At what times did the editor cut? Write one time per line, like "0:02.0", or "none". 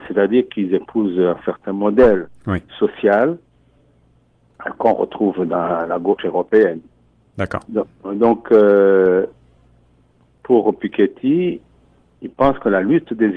none